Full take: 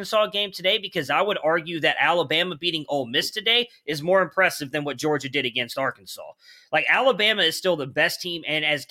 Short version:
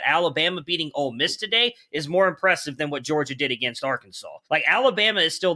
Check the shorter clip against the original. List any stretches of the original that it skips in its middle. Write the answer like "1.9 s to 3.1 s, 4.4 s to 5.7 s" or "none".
6.4 s to 6.7 s